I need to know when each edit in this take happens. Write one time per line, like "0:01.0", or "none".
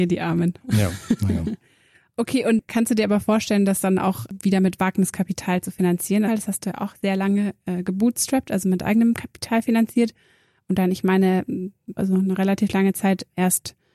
0:06.3
0:12.0